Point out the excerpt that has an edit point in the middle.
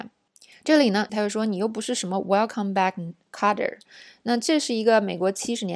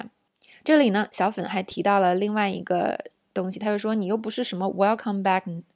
first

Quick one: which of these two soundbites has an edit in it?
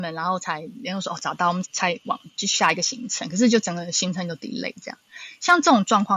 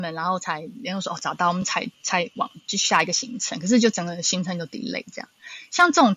first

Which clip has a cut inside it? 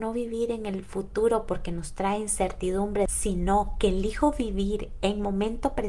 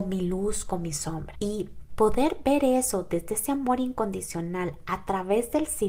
second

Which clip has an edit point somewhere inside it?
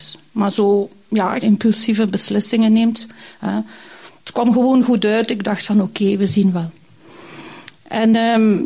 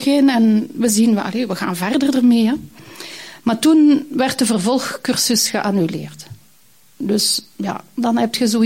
first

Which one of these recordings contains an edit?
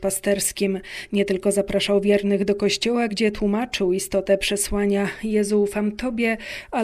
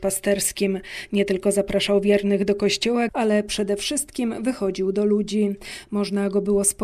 second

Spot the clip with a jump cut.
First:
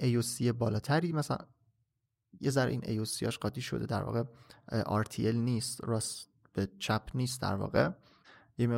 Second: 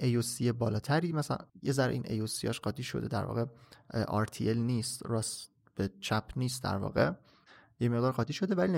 second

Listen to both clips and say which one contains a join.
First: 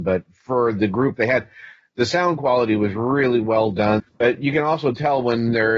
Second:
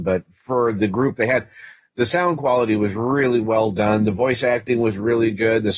first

